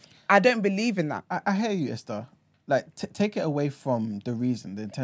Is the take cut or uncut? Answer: uncut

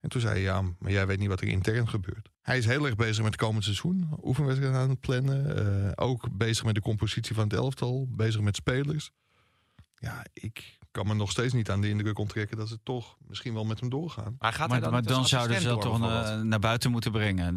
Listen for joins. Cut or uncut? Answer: cut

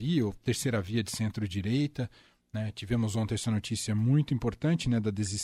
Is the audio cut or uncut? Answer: uncut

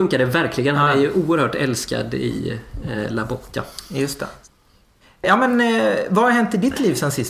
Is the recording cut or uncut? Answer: uncut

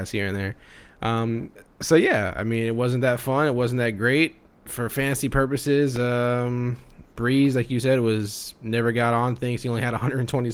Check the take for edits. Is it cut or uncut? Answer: uncut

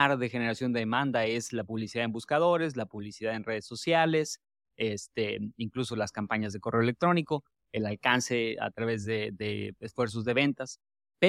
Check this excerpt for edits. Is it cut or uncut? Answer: uncut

